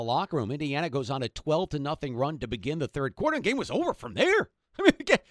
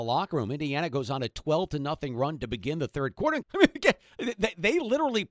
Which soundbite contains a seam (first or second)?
second